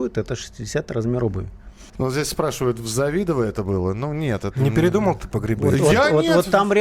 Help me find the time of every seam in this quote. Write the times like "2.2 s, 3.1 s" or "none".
1.9 s